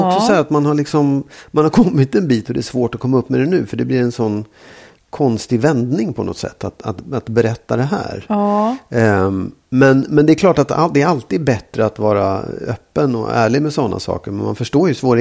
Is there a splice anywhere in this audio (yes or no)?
no